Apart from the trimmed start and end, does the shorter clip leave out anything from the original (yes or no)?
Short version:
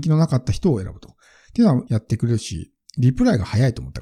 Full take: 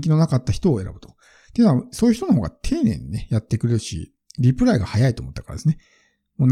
yes